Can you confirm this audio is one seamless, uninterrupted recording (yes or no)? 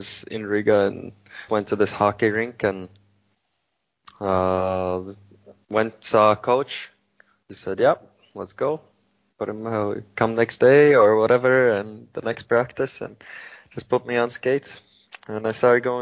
no